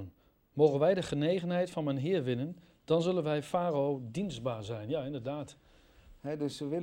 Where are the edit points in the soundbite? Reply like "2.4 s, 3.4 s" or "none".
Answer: none